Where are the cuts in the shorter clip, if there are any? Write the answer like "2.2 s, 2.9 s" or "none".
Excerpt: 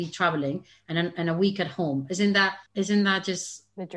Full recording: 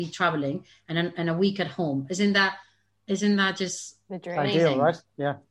2.7 s